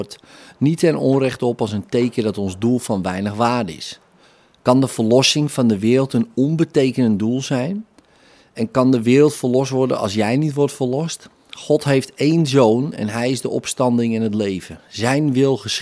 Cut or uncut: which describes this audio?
uncut